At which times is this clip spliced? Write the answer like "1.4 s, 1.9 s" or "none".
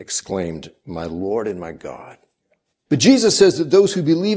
2.9 s